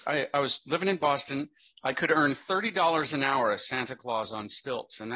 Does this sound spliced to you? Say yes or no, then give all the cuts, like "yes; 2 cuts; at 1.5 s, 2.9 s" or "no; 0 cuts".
no; 0 cuts